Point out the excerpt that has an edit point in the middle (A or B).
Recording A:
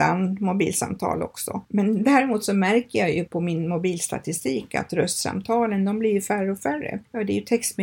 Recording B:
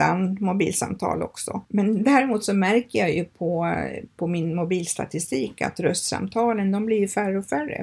A